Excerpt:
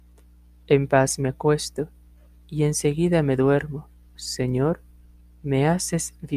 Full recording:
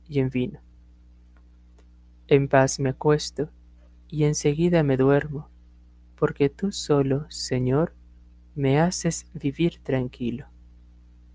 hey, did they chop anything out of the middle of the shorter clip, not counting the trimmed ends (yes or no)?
yes